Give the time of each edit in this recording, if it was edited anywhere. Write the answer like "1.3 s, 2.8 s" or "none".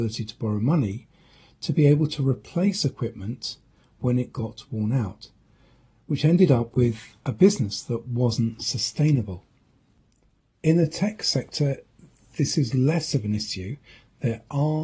none